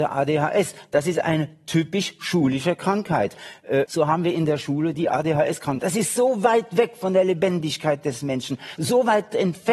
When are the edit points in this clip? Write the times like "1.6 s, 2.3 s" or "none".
3.9 s, 5.8 s, 8.8 s